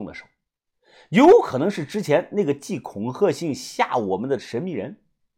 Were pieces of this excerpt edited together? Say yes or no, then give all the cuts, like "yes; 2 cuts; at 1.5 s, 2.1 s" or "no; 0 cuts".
no; 0 cuts